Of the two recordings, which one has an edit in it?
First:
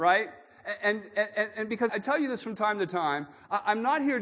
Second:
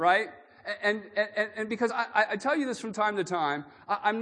first; 1 cut; at 1.9 s

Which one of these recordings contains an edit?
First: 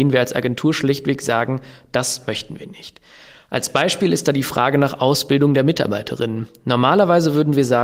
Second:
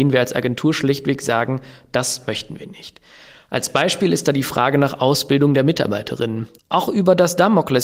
second; 1 cut; at 6.6 s

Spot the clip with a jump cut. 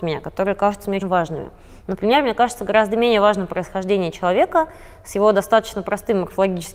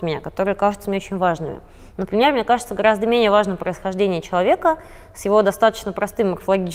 first; 1 cut; at 1.0 s

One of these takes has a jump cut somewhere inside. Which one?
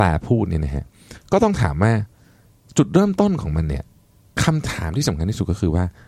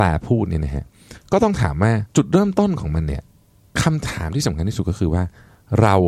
second; 1 cut; at 2.1 s

